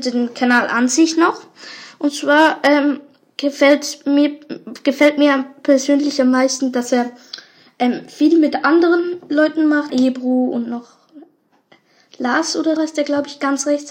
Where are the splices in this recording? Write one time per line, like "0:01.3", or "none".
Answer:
0:09.9
0:12.8